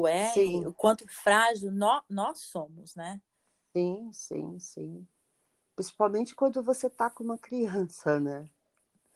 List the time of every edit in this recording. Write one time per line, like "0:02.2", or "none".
none